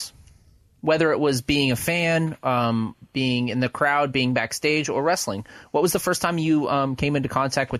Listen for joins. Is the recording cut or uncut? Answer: uncut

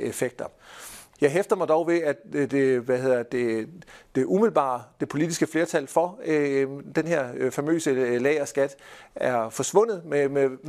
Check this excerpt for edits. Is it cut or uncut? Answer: cut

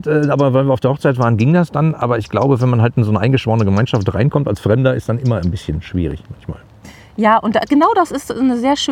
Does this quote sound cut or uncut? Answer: uncut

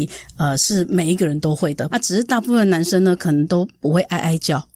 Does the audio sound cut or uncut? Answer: cut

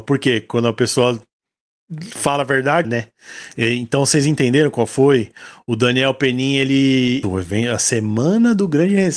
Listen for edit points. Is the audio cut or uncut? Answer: cut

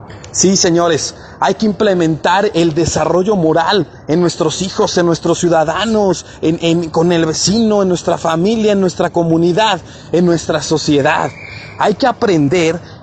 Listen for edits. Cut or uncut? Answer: uncut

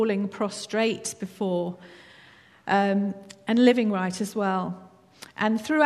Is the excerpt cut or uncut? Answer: uncut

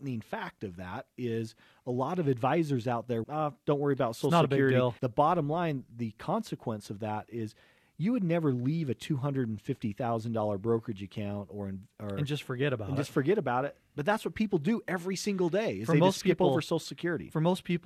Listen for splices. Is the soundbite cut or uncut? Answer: cut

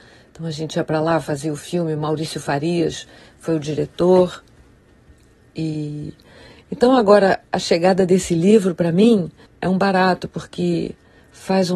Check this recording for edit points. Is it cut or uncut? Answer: cut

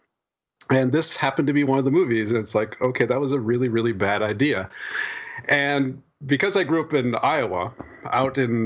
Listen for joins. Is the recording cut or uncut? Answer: uncut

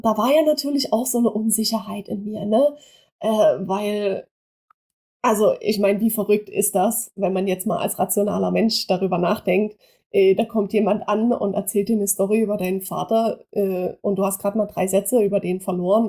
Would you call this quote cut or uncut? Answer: uncut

